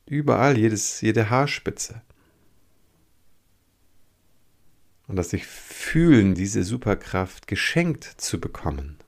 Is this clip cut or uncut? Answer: cut